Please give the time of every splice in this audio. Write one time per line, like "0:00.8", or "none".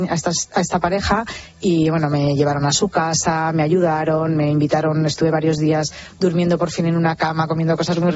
none